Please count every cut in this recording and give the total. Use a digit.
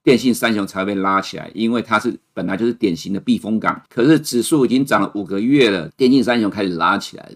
2